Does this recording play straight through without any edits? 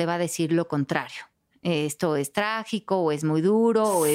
yes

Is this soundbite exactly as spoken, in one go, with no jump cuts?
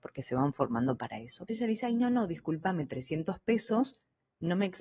no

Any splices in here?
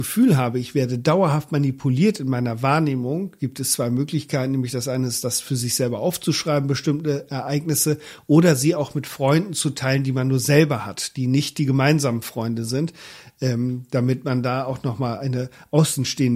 no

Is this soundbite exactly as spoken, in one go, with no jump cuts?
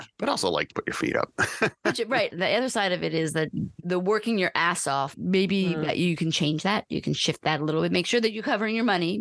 no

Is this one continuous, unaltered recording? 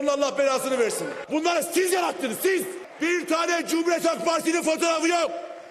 no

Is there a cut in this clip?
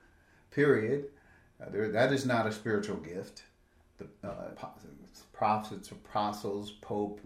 yes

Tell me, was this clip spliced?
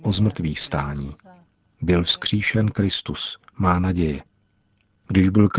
no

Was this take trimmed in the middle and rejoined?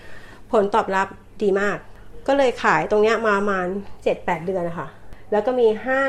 no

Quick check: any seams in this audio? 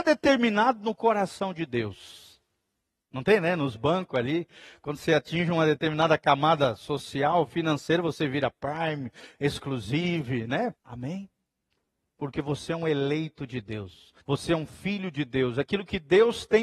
yes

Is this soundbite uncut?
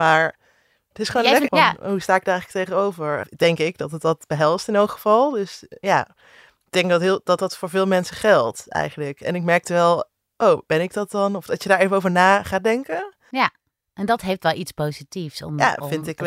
no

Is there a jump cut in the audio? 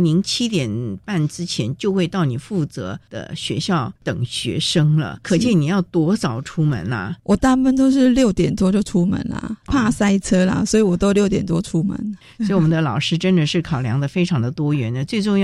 no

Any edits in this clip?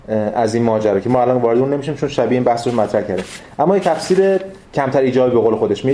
yes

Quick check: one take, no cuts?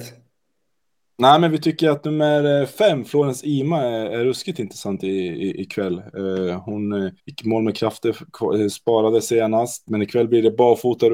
no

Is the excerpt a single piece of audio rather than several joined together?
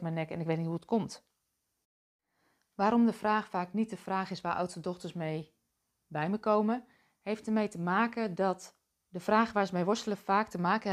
yes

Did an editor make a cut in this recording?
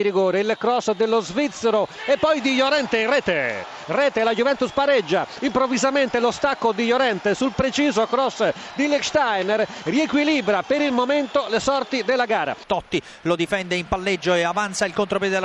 no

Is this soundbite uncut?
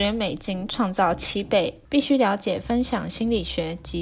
no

